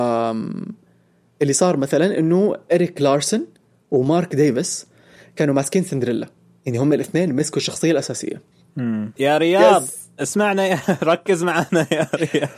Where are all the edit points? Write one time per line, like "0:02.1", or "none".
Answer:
0:09.2